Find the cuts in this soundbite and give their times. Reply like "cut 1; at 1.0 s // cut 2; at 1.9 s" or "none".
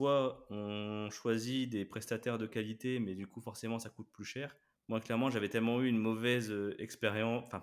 cut 1; at 4.8 s